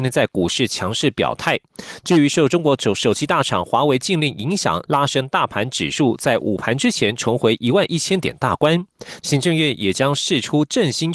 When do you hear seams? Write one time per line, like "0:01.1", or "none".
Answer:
0:04.9
0:09.2

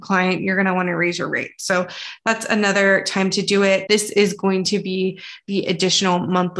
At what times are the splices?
0:03.9

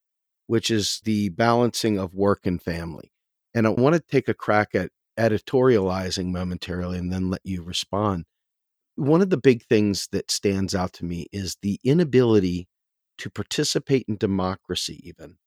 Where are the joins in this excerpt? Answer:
none

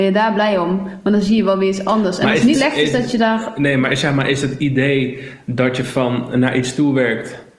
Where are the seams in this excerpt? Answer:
0:02.5

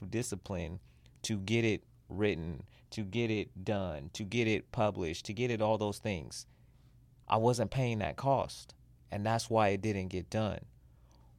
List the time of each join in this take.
none

